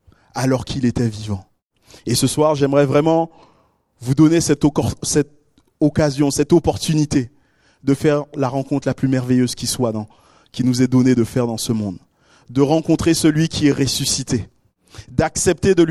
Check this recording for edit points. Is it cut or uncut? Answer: uncut